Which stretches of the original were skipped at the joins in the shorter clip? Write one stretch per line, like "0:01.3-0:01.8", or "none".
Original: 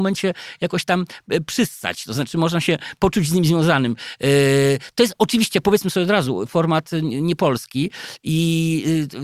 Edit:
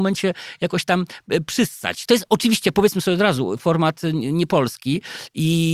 0:02.1-0:04.9